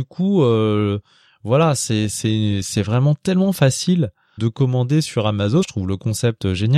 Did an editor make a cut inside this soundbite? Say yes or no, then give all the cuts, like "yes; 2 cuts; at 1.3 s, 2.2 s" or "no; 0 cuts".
yes; 2 cuts; at 4.4 s, 5.6 s